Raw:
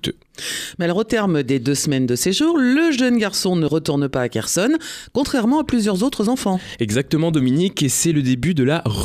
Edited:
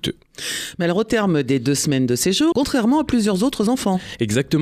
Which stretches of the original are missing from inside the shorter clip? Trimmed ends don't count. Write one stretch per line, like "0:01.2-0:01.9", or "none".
0:02.5-0:05.1